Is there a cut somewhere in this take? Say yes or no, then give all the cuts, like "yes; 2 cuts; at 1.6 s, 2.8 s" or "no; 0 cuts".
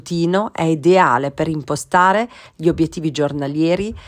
no; 0 cuts